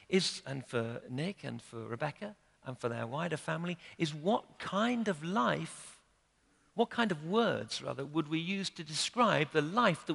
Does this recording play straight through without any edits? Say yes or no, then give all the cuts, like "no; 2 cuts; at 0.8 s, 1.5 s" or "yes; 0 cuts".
no; 1 cut; at 1.0 s